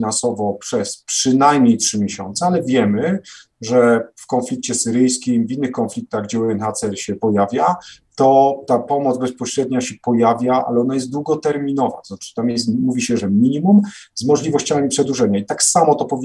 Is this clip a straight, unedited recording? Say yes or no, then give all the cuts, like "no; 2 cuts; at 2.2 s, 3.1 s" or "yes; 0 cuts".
yes; 0 cuts